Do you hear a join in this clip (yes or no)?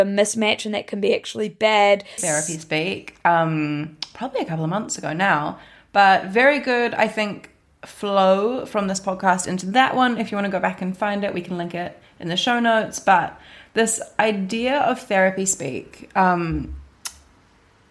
yes